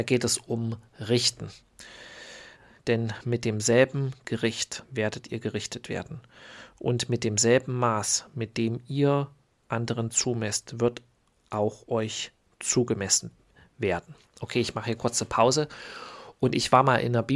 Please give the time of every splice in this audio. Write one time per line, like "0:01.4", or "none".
0:02.8
0:04.8